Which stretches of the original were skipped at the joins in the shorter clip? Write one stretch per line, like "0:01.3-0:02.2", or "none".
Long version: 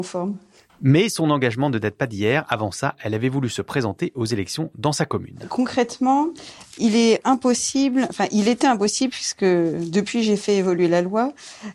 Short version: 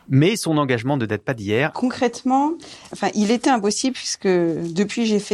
0:02.5-0:05.5
0:06.7-0:08.1